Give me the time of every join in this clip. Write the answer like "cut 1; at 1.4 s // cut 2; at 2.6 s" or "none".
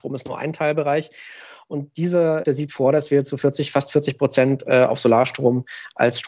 cut 1; at 2.4 s